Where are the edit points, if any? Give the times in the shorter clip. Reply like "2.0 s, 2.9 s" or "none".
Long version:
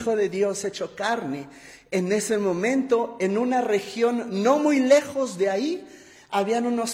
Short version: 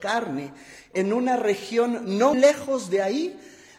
0.9 s, 2.3 s